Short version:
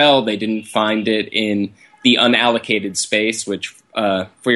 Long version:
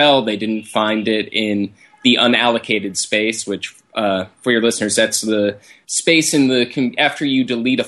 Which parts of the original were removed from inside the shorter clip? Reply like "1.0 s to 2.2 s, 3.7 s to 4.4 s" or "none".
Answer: none